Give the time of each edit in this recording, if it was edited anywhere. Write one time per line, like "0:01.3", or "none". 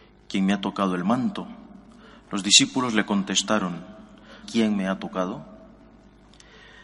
0:04.4